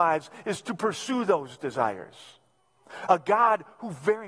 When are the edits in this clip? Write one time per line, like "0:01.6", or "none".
0:03.1